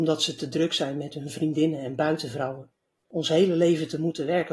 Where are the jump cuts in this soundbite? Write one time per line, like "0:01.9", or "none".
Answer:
0:03.0